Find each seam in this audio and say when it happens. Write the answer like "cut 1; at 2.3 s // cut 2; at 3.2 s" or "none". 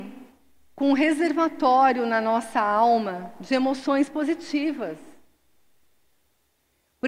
none